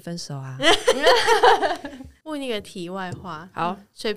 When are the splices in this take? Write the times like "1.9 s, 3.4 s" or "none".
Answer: none